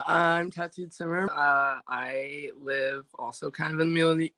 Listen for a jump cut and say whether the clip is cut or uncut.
cut